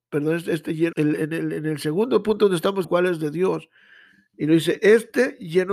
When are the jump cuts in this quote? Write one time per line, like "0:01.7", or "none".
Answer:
0:00.9
0:02.8